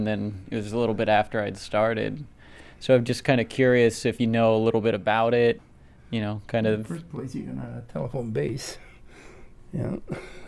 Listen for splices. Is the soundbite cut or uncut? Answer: uncut